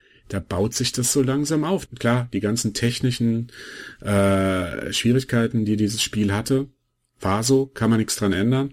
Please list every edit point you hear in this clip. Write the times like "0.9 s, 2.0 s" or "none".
1.9 s